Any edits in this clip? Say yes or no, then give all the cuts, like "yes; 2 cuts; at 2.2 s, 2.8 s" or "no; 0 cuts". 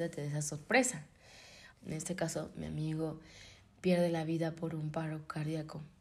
yes; 1 cut; at 1.7 s